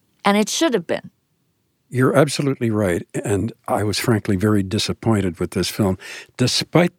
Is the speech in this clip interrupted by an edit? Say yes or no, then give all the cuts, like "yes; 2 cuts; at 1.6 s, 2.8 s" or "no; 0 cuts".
no; 0 cuts